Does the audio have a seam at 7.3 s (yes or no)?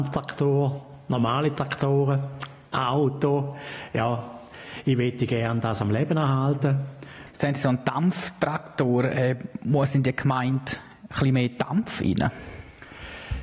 yes